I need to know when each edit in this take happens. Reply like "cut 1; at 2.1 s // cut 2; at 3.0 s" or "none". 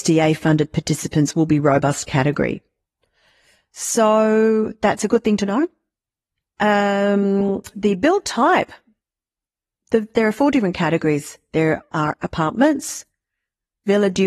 none